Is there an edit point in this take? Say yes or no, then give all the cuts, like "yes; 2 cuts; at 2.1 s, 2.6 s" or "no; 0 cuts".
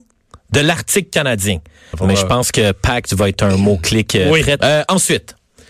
yes; 2 cuts; at 1.9 s, 4.6 s